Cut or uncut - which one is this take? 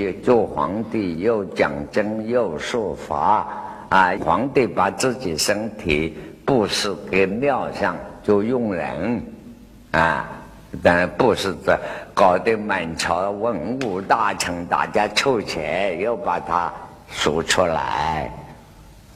cut